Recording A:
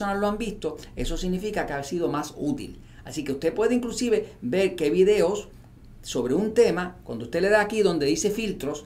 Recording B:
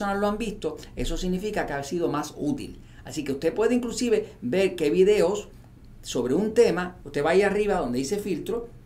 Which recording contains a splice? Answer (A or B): B